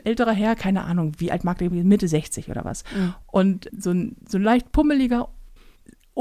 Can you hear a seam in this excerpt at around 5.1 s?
no; 1 cut; at 3.7 s

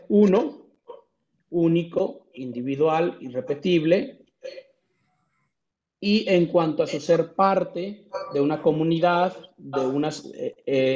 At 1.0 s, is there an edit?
no; 0 cuts

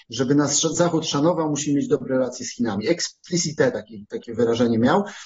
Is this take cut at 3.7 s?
no; 0 cuts

